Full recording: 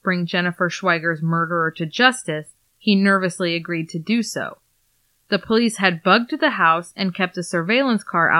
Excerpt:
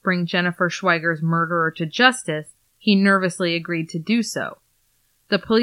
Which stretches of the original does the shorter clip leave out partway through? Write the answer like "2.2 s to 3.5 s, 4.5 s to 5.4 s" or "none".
none